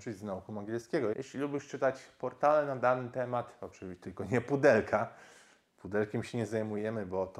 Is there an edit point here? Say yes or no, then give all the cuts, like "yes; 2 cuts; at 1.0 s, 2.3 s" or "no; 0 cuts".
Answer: yes; 1 cut; at 1.1 s